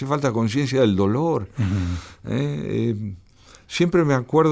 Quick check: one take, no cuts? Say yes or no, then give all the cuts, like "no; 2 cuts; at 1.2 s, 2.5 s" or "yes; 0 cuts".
yes; 0 cuts